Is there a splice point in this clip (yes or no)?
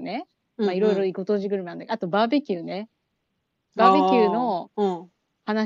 no